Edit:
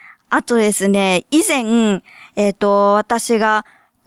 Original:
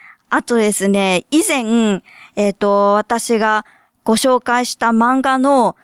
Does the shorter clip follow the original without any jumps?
yes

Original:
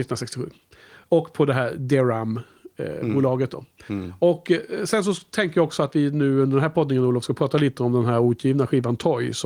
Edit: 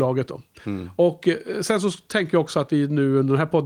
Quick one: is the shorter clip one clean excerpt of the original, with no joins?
yes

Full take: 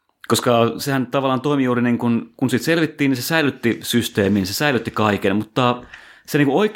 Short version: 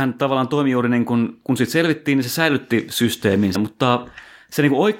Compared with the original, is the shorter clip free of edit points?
no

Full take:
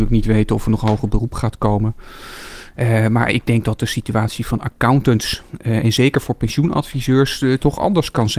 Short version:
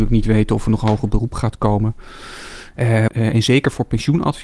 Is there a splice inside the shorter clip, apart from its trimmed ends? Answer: yes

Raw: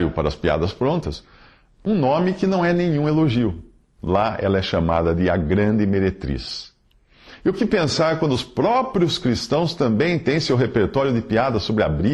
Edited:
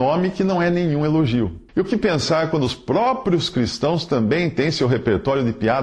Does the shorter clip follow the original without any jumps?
no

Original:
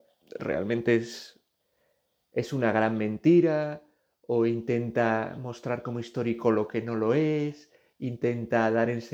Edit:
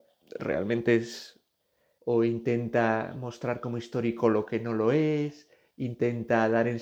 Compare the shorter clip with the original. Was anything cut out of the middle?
yes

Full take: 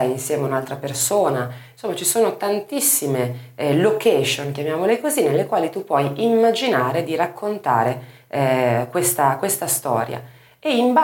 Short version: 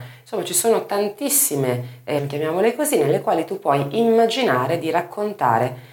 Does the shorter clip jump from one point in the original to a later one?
yes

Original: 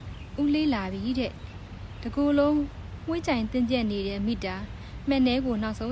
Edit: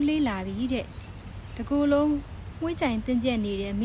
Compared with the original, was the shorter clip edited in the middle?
no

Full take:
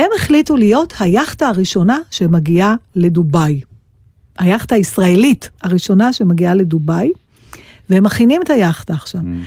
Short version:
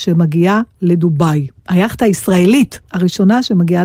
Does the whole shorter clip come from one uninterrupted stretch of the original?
no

